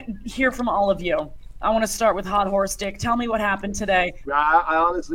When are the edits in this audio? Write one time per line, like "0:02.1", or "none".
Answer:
0:04.2